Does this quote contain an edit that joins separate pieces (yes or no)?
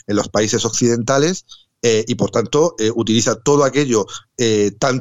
no